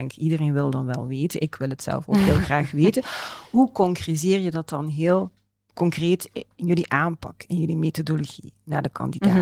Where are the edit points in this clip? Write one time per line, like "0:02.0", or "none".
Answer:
none